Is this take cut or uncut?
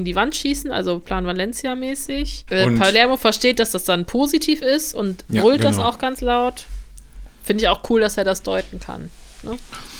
cut